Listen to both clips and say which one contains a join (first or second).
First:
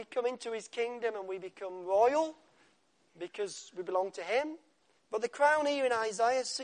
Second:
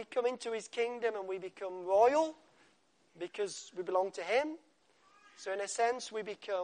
first